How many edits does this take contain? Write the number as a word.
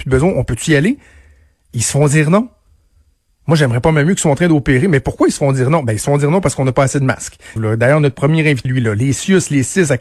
two